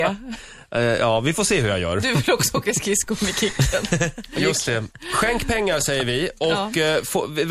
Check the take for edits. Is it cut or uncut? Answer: uncut